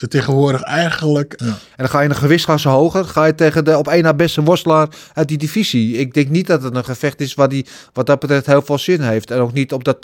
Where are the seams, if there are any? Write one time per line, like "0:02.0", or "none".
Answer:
0:01.4